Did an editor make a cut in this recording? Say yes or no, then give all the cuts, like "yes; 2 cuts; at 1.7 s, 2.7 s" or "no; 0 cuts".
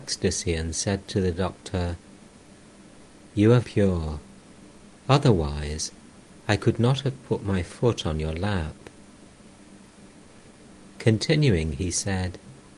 yes; 1 cut; at 3.6 s